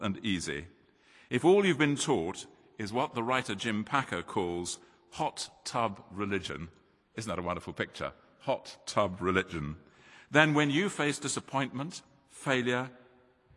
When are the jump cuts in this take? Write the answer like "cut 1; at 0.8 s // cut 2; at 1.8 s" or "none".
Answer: none